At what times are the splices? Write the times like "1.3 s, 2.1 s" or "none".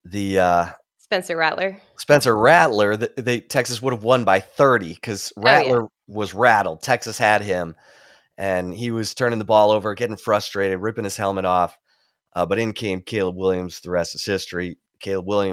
none